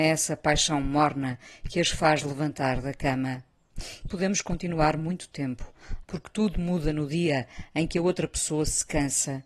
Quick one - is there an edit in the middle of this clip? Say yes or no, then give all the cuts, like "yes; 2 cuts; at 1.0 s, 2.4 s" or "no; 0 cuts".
yes; 2 cuts; at 4.1 s, 6.0 s